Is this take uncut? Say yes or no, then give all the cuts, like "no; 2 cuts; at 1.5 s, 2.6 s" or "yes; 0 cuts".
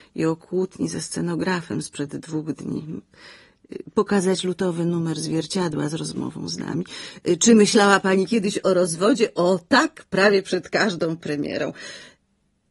yes; 0 cuts